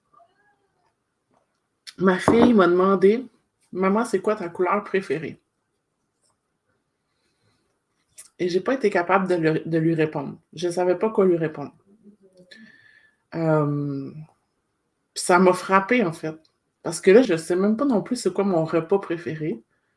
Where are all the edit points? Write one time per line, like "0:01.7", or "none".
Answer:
0:17.2

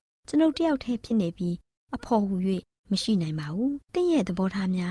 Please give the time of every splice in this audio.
0:03.8

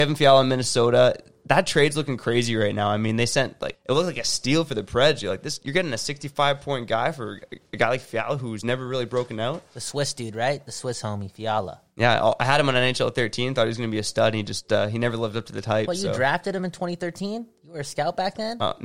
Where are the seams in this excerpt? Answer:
0:03.7

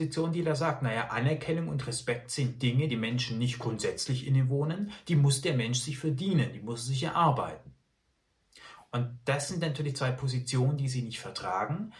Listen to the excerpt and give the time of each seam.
0:02.9

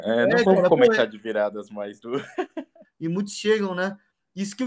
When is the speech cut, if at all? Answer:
0:02.8

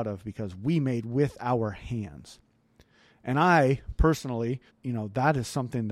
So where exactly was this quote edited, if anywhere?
0:04.7

